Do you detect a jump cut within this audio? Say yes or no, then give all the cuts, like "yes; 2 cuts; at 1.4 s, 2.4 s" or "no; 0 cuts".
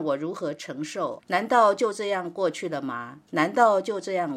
yes; 1 cut; at 1.2 s